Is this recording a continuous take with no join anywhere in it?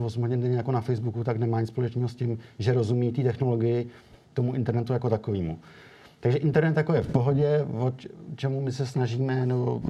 yes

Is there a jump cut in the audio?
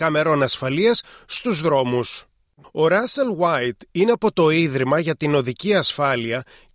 yes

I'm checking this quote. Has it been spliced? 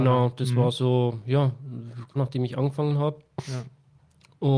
yes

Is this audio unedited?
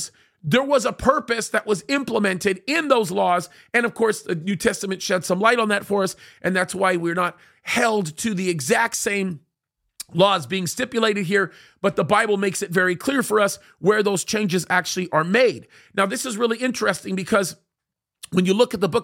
yes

